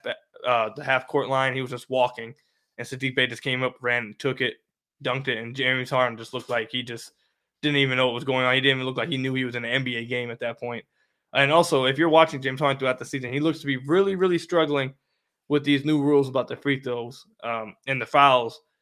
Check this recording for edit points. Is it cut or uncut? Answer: uncut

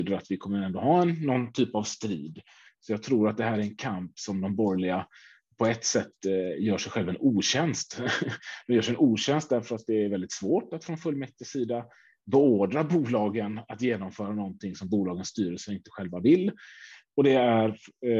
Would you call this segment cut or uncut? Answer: cut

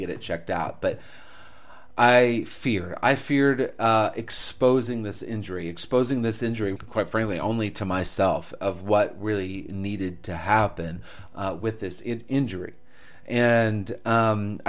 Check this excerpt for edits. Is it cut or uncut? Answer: cut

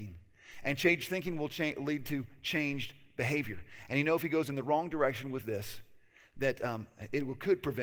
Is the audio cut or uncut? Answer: uncut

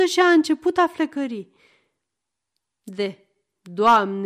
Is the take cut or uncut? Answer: uncut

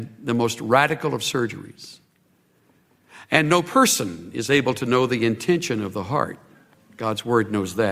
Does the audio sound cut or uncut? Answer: uncut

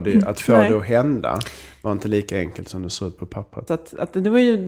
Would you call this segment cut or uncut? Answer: cut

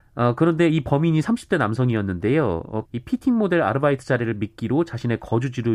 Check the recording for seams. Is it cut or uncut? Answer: cut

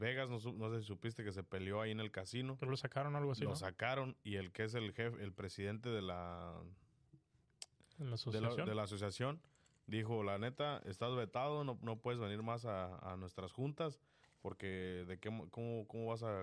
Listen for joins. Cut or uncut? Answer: uncut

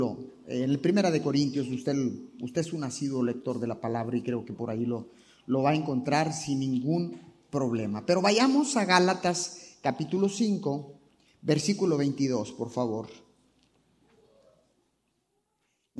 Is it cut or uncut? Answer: uncut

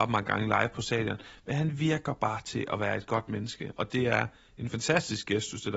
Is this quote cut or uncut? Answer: uncut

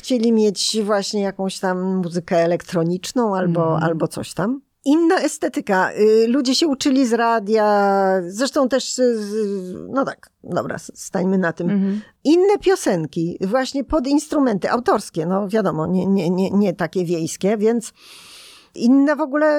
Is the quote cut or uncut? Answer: uncut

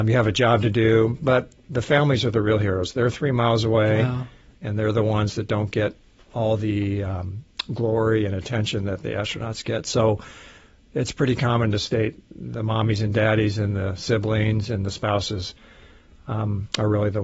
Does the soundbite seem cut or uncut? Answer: cut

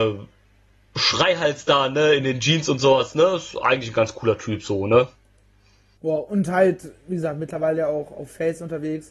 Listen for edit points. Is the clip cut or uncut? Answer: uncut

